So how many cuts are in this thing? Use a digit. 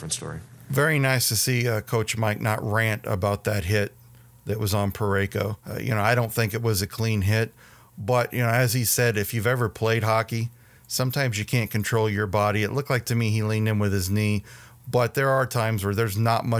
1